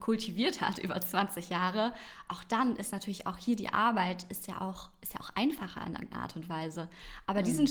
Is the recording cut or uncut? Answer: uncut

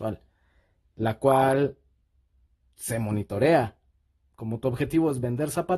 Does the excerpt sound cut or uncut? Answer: cut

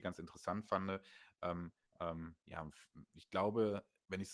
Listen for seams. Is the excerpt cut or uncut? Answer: cut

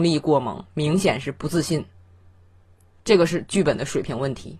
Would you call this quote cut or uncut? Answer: uncut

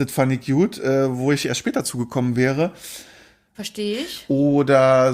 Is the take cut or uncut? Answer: cut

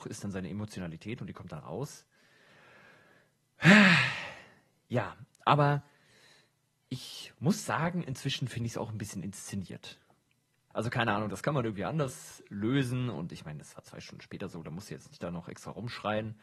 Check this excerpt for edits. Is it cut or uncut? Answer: cut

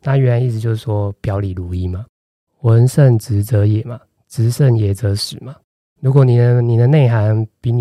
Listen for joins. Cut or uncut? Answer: uncut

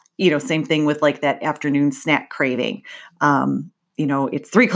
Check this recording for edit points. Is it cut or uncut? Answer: uncut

